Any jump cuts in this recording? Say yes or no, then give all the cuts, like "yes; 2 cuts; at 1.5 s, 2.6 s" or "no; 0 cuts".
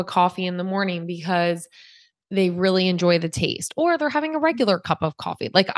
no; 0 cuts